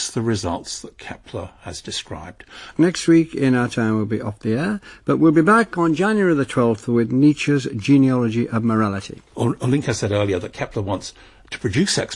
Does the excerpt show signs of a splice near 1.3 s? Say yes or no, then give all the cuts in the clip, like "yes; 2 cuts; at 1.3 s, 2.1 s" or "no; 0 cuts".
no; 2 cuts; at 2.7 s, 9.3 s